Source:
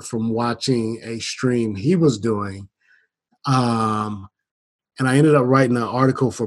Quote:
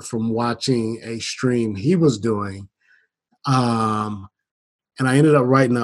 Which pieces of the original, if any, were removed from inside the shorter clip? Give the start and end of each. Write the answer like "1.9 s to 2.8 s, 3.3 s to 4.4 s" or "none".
none